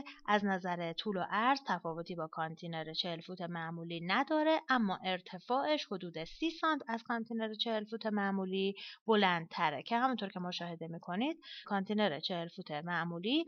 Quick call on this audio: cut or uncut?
cut